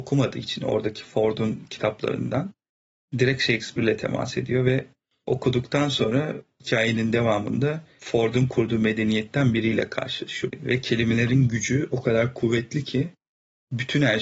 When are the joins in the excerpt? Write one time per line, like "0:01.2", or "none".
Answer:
0:10.5